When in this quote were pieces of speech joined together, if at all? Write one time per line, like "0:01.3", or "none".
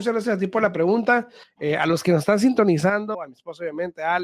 0:01.4
0:03.1